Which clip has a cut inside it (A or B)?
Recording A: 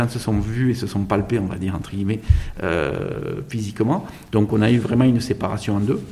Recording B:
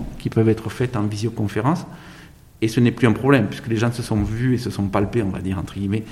A